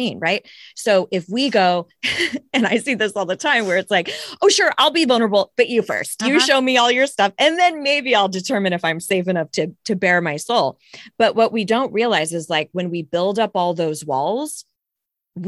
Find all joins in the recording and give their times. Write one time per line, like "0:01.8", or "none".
0:06.2